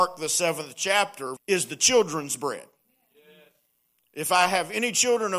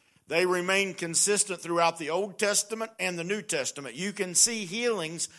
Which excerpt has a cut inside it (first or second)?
first